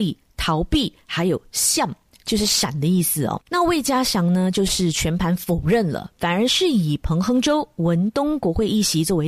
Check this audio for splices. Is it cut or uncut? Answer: uncut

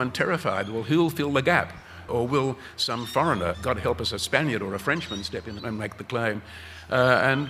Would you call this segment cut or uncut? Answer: cut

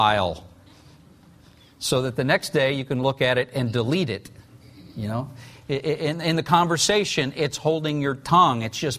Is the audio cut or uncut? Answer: uncut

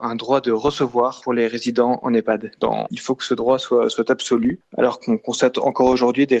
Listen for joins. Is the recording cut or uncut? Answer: cut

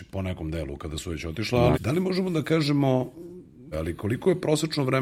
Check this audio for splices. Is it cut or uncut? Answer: cut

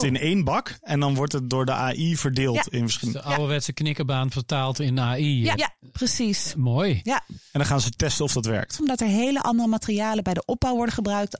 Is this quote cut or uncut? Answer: cut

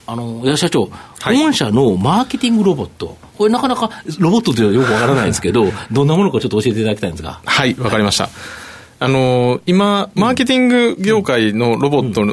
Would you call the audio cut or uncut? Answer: uncut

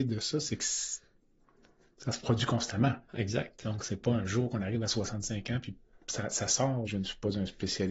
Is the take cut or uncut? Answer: cut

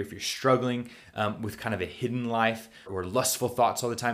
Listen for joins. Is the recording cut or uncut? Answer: cut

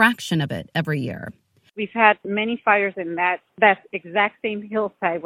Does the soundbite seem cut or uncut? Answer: cut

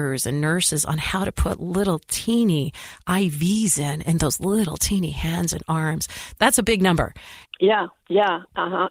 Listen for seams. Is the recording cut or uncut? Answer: cut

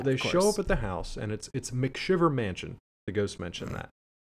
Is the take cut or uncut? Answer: cut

